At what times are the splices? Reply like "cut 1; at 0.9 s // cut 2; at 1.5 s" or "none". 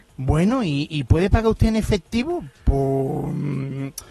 none